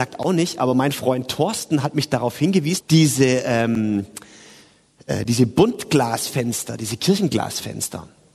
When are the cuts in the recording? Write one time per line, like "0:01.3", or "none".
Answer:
0:02.8